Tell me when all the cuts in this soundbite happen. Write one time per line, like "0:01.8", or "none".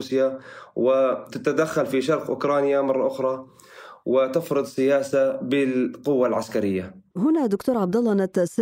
0:07.1